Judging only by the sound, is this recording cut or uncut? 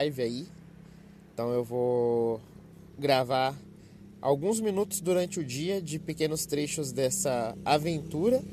uncut